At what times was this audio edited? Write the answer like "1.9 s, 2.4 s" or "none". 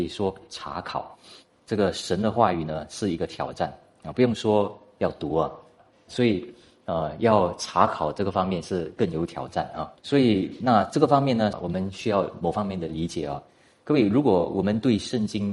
6.1 s, 10.0 s, 11.5 s